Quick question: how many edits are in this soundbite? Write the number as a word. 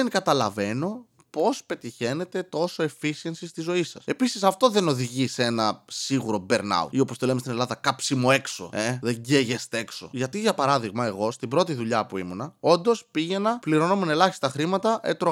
zero